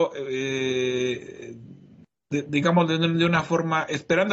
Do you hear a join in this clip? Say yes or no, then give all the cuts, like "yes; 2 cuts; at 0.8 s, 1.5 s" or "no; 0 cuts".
no; 0 cuts